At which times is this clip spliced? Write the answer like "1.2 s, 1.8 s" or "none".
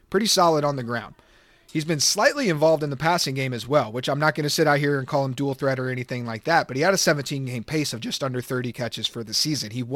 none